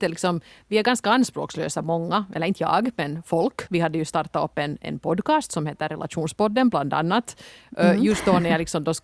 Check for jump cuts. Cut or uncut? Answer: cut